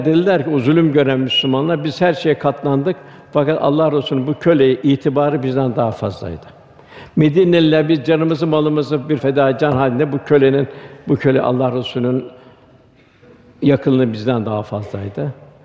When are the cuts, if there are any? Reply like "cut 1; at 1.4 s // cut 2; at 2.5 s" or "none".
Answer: cut 1; at 9.2 s